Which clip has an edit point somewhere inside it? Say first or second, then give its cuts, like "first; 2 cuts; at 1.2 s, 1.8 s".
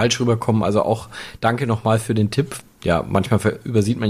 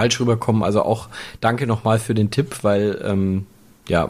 first; 1 cut; at 2.6 s